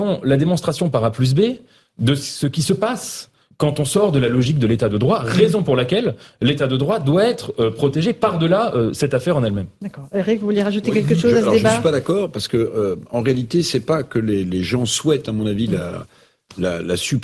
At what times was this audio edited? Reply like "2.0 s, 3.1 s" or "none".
none